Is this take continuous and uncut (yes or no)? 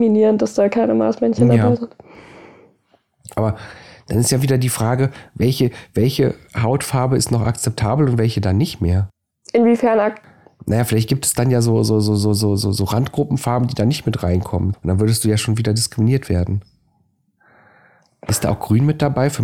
no